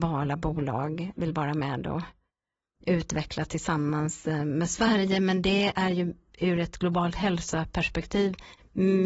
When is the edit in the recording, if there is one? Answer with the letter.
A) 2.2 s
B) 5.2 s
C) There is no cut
C